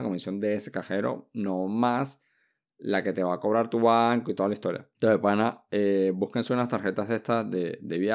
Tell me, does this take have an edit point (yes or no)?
yes